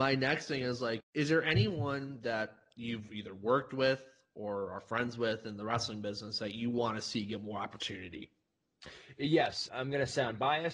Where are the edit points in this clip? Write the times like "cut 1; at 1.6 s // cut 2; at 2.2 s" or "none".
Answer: cut 1; at 1.0 s // cut 2; at 9.7 s